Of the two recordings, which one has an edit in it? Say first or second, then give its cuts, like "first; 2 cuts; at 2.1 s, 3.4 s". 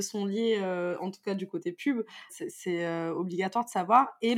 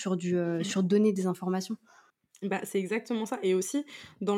first; 1 cut; at 2.3 s